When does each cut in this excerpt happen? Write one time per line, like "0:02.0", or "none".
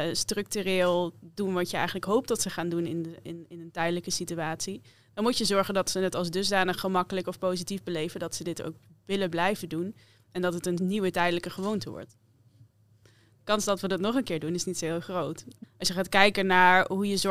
0:13.0
0:15.6